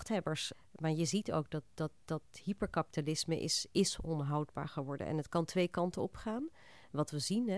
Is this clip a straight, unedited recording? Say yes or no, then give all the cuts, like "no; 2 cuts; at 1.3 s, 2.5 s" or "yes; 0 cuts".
yes; 0 cuts